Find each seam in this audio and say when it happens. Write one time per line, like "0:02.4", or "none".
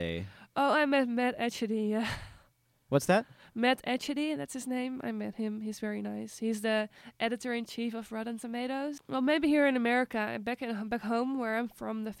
0:09.0